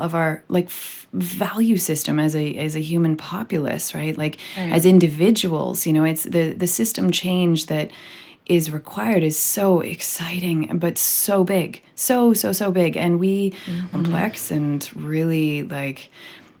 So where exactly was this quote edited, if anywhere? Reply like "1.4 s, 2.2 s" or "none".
13.9 s